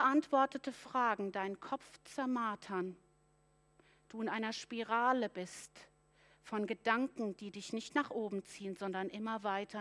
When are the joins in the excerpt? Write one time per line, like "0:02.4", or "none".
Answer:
none